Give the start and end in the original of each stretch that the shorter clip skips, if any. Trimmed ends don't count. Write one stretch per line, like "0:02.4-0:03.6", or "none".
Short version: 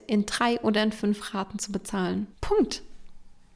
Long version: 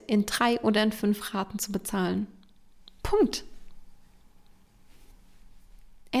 0:02.3-0:02.9